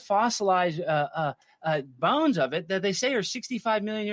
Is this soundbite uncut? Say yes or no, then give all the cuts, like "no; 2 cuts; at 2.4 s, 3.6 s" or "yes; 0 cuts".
yes; 0 cuts